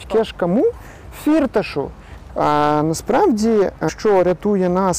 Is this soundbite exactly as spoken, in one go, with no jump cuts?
no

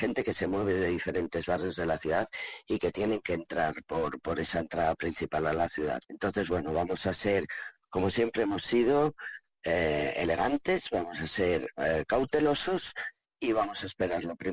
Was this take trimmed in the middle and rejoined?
yes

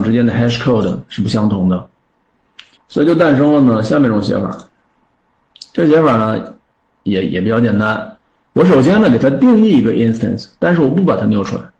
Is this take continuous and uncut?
no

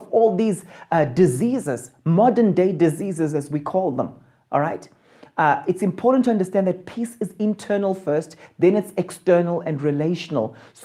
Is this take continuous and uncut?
yes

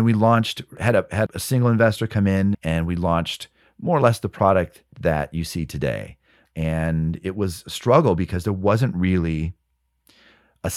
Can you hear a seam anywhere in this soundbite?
yes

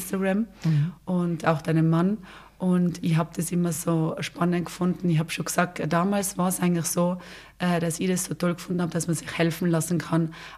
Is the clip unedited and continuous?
yes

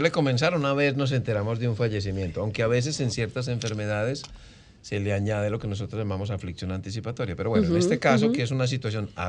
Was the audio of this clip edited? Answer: no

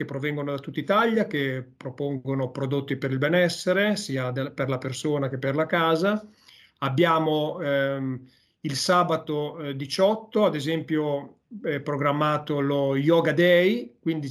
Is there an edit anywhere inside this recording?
no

